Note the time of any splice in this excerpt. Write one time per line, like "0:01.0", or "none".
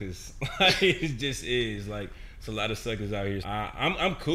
0:03.4